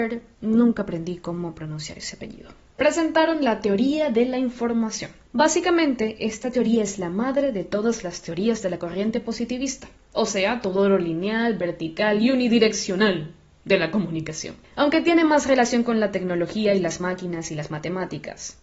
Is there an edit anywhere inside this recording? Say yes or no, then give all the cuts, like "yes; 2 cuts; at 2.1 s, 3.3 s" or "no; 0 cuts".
no; 0 cuts